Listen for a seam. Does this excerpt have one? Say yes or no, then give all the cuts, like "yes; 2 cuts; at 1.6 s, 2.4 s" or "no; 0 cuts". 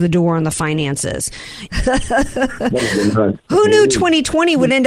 yes; 1 cut; at 1.7 s